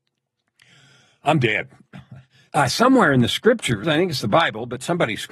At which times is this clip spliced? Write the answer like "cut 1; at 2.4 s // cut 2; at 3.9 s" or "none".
cut 1; at 2.5 s // cut 2; at 3.8 s